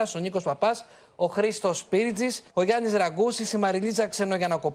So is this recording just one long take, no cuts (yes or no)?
no